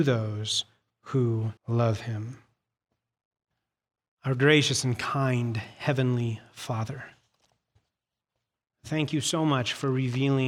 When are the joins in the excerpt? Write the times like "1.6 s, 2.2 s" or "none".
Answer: 1.6 s